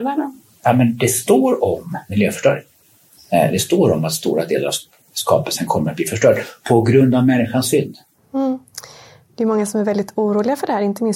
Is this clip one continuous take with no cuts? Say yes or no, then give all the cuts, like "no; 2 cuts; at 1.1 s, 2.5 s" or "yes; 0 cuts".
no; 1 cut; at 2.1 s